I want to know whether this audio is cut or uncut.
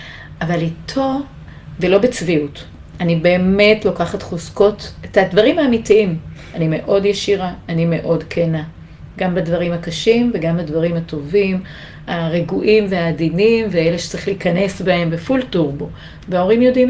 uncut